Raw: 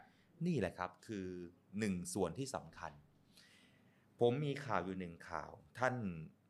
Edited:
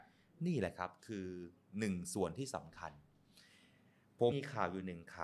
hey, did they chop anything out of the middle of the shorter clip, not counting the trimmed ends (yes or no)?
yes